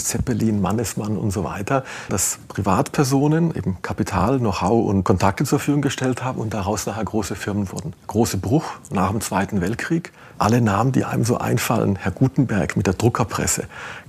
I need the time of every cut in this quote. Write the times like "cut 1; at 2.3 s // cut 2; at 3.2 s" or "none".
cut 1; at 2.1 s // cut 2; at 8.0 s // cut 3; at 10.3 s